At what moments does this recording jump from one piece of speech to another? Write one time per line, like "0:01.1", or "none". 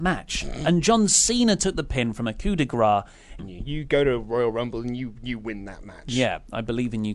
0:03.4